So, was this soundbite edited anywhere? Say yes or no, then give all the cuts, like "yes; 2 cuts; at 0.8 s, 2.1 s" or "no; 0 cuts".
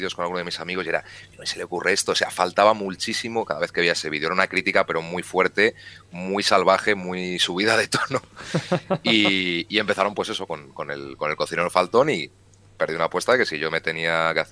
no; 0 cuts